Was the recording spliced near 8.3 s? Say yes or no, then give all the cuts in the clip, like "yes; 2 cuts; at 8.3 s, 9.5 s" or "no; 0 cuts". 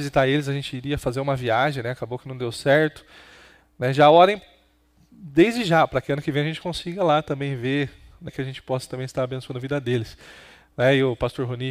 yes; 1 cut; at 8.3 s